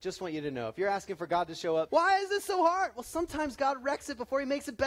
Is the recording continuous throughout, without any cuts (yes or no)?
no